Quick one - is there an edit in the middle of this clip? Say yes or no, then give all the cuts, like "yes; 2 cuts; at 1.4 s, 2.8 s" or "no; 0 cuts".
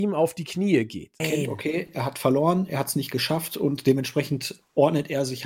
yes; 1 cut; at 1.2 s